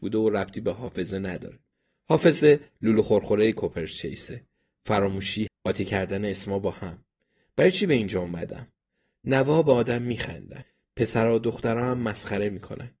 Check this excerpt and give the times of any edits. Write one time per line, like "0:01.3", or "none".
0:05.5